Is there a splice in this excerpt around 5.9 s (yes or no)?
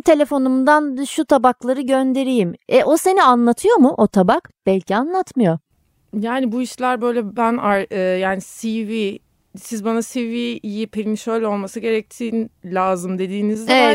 no